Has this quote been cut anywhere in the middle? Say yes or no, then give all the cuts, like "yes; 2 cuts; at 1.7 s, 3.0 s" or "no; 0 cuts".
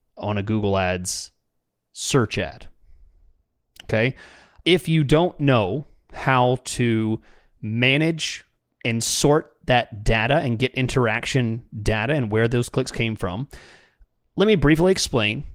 no; 0 cuts